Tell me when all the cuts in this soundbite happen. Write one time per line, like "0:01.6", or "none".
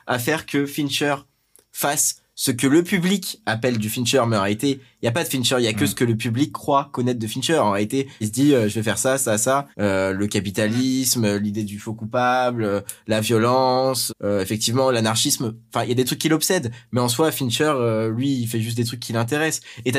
0:08.2
0:09.7
0:14.1